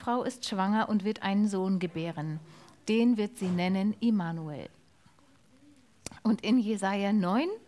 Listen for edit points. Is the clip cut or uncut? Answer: uncut